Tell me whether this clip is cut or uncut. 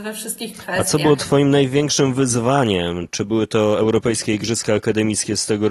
uncut